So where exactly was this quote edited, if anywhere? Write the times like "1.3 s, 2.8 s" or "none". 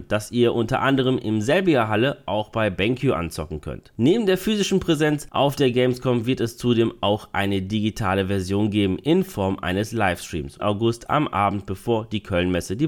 10.6 s